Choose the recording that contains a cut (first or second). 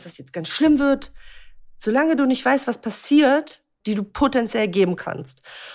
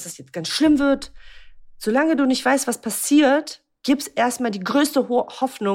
first